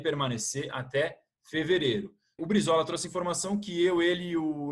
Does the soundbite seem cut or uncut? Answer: cut